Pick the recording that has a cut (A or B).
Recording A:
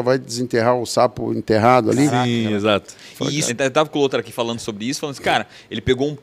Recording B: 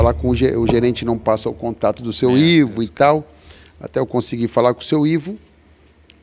A